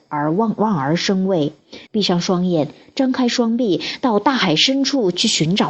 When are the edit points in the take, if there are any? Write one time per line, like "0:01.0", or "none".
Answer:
0:01.9